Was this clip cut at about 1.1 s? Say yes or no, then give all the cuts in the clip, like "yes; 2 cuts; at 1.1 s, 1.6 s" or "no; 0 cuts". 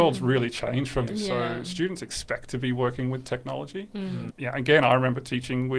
yes; 1 cut; at 1.1 s